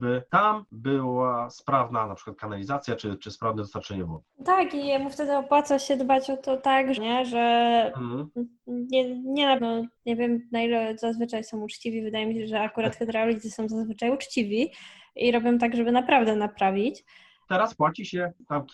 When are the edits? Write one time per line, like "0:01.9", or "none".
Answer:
0:07.0
0:09.6
0:17.5